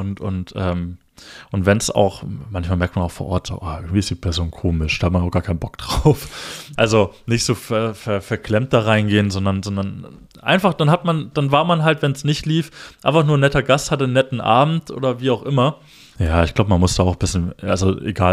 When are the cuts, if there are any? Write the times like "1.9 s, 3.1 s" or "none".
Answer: 6.8 s, 16.2 s